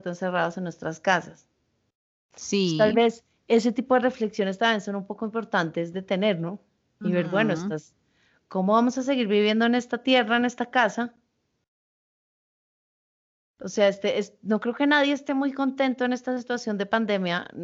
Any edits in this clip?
no; 0 cuts

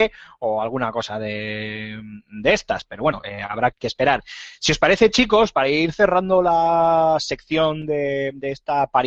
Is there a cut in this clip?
yes; 1 cut; at 3.7 s

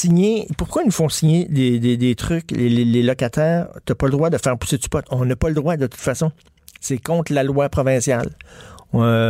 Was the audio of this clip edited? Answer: no; 0 cuts

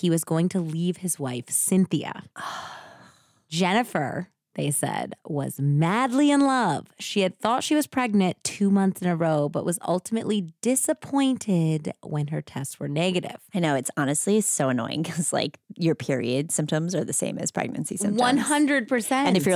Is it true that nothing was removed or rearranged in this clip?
yes; 0 cuts

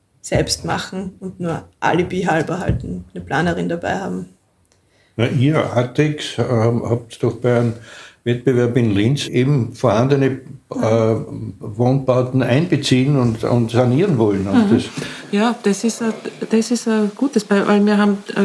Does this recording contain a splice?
no; 0 cuts

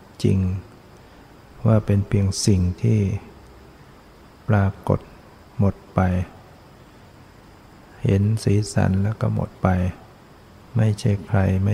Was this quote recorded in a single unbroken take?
yes; 0 cuts

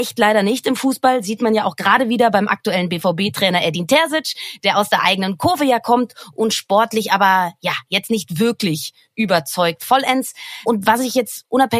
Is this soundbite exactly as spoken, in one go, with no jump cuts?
yes; 0 cuts

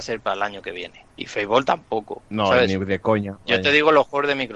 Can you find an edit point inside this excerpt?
yes; 1 cut; at 1.1 s

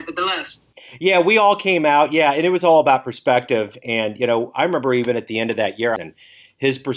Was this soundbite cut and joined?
yes; 1 cut; at 6.0 s

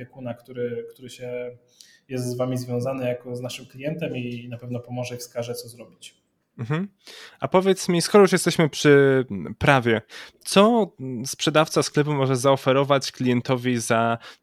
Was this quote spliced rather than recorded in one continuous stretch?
no; 0 cuts

